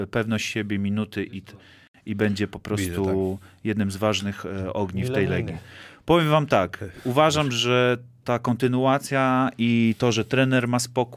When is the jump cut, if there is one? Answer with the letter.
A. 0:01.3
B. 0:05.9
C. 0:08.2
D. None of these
C